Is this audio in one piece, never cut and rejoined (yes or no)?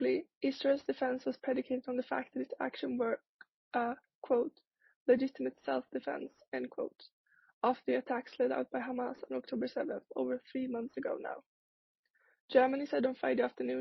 yes